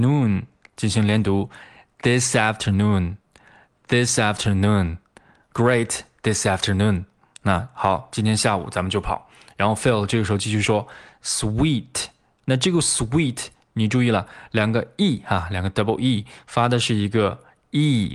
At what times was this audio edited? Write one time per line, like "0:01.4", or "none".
none